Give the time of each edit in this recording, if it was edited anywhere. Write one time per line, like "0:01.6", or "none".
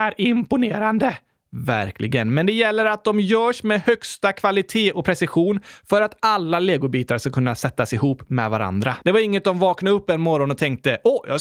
0:09.0